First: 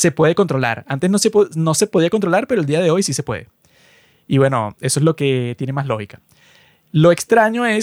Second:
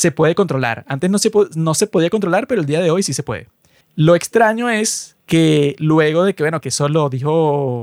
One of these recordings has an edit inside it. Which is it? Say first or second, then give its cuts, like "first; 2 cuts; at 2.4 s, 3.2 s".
second; 3 cuts; at 3.8 s, 5.2 s, 6.6 s